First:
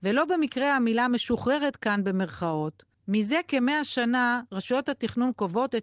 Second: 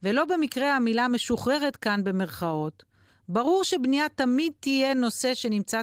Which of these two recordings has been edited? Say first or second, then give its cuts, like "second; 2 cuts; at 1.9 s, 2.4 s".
first; 1 cut; at 2.9 s